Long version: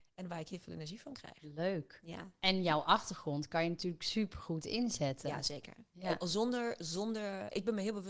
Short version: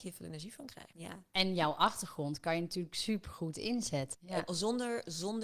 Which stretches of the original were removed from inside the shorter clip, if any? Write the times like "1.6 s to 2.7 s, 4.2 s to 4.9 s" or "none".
1.4 s to 2.0 s, 5.2 s to 5.9 s